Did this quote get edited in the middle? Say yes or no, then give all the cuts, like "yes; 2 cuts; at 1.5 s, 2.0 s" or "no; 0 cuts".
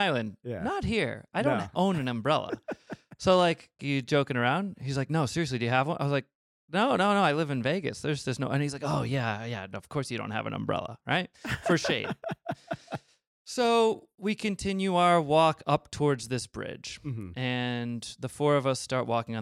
yes; 1 cut; at 3.8 s